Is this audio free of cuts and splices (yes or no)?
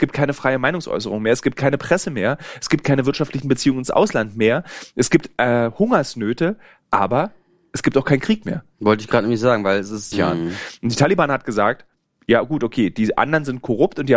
no